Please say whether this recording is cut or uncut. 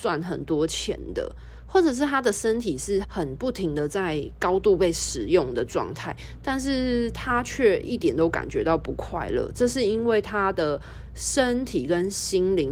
cut